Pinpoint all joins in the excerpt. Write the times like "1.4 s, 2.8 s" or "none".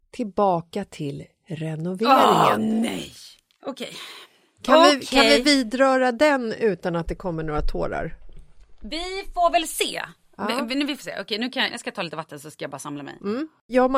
11.7 s